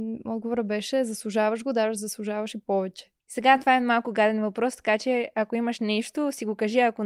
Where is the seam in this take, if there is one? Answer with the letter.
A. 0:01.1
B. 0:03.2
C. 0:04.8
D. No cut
B